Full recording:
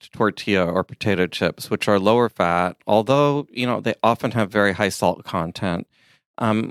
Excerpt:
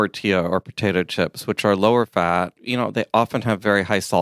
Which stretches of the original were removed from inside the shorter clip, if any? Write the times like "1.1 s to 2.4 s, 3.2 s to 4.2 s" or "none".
2.8 s to 3.5 s